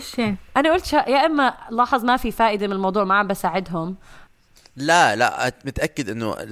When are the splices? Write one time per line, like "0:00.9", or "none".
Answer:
none